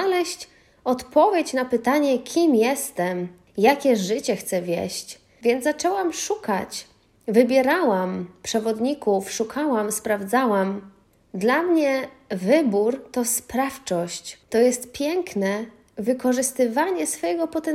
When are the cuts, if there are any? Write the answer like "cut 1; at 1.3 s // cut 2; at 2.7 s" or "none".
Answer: none